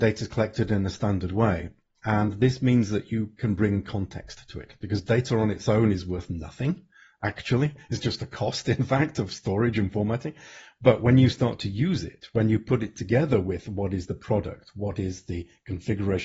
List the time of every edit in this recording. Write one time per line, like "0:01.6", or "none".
none